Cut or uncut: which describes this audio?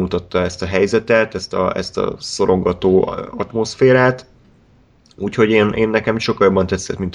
uncut